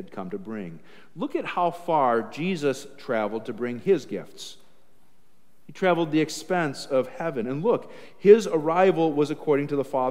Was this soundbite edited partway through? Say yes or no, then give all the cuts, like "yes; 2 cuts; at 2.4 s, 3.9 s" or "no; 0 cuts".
no; 0 cuts